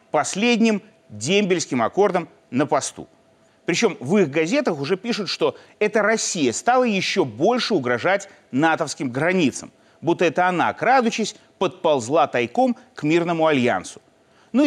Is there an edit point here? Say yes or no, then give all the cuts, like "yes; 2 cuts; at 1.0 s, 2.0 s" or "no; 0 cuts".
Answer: yes; 1 cut; at 3.5 s